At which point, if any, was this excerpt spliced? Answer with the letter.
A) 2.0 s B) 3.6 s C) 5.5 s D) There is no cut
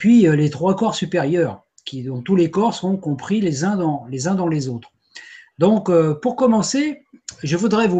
C